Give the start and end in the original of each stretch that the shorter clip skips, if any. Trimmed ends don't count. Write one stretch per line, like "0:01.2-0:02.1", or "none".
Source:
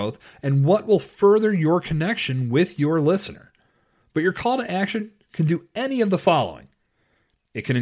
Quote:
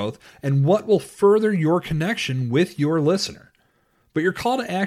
none

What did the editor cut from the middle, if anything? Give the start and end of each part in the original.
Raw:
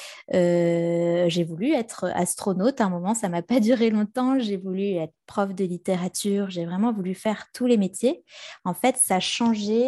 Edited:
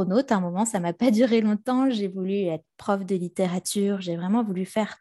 none

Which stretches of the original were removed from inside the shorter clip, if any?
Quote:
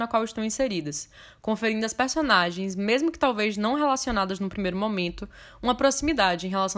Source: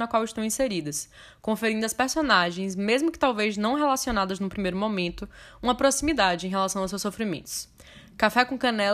none

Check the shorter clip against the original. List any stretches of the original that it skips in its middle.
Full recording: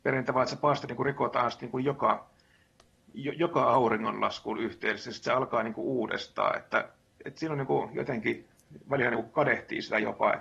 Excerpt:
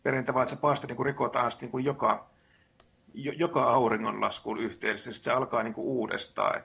none

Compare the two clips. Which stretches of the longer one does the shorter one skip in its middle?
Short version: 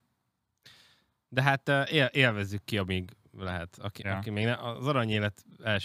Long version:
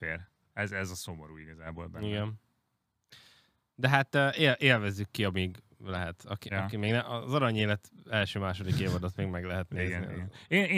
none

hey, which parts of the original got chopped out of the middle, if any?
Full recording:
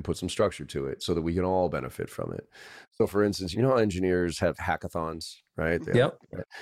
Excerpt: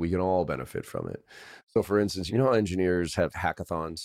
none

